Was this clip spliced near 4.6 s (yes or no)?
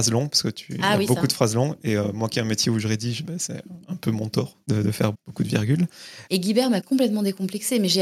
no